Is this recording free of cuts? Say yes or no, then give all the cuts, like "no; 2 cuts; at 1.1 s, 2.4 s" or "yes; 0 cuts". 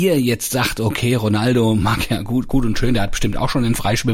yes; 0 cuts